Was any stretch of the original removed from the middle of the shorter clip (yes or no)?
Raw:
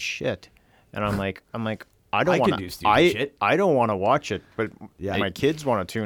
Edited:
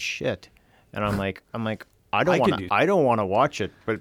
yes